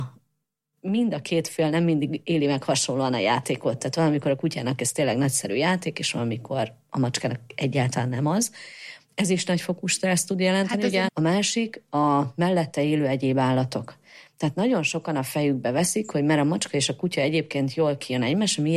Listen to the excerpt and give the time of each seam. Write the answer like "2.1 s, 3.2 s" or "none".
11.1 s